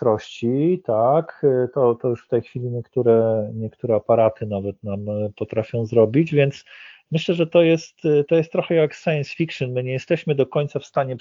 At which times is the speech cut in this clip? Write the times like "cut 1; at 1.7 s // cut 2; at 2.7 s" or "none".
none